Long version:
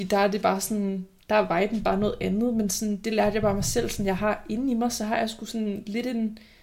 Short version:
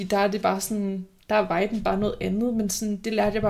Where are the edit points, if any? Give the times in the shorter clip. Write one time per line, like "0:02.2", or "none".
none